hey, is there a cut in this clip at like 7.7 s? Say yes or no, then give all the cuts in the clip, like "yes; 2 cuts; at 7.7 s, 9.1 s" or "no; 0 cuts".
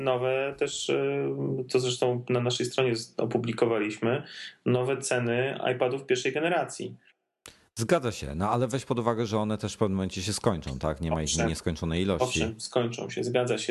no; 0 cuts